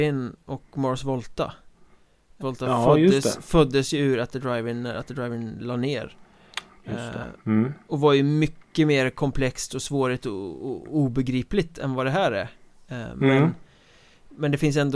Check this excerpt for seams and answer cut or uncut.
cut